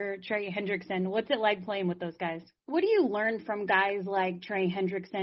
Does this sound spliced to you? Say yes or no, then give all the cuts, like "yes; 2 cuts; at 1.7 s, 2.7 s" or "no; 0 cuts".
yes; 1 cut; at 2.6 s